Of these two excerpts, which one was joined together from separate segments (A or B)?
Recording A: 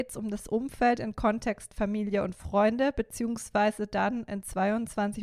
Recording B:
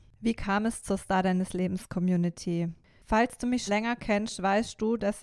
B